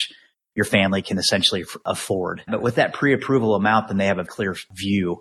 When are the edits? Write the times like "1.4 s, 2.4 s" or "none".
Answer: 2.5 s, 4.3 s